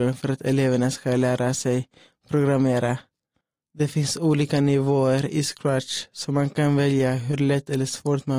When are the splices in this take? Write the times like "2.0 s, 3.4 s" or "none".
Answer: none